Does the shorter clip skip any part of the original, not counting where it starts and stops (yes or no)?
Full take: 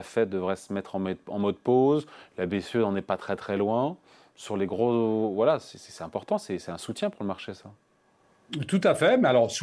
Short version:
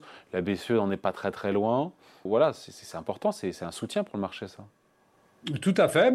yes